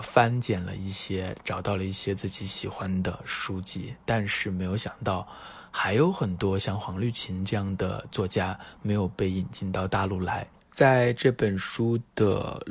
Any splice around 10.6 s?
yes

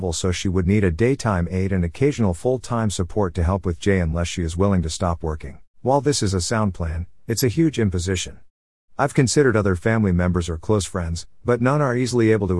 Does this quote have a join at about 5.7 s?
yes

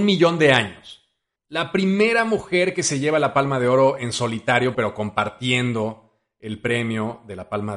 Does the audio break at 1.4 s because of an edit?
yes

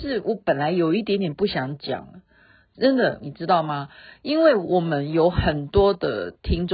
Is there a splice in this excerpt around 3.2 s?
yes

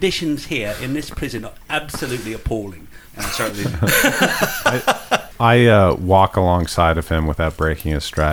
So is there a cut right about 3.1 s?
yes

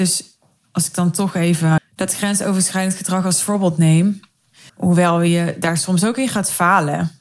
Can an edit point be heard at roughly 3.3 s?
no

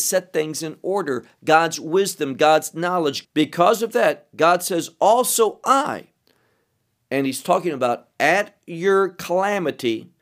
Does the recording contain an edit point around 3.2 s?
yes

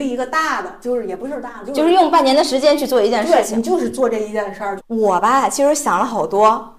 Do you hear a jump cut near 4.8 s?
yes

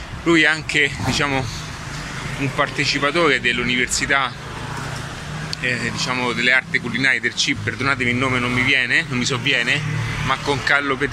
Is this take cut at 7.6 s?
yes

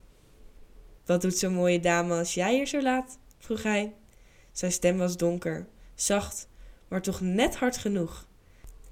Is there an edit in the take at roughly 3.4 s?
no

